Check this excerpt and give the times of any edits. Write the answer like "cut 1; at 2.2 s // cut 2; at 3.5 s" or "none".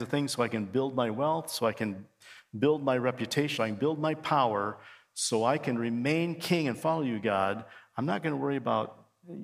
cut 1; at 3.6 s